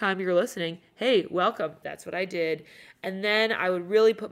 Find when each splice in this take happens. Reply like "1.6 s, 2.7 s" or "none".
1.8 s